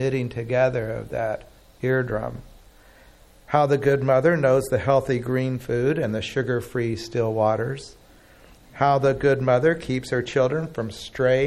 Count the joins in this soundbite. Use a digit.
0